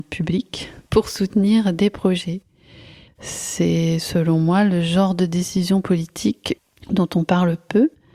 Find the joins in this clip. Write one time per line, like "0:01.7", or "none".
0:03.1